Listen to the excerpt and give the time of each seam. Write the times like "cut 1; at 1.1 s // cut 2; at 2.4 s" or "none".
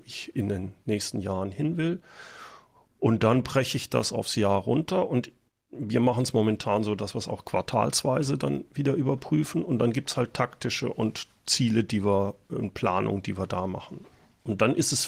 none